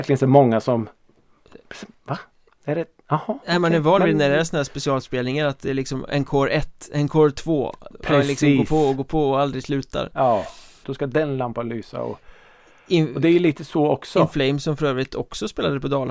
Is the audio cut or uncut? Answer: cut